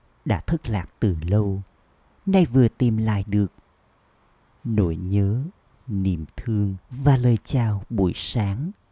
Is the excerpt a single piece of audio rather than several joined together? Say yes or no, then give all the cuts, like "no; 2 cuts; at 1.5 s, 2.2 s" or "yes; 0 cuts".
no; 1 cut; at 6.8 s